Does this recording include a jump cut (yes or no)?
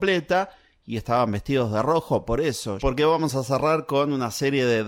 yes